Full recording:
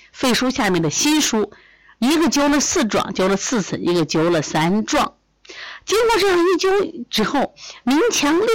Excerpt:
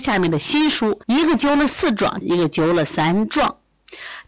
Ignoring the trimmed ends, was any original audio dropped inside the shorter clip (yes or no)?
yes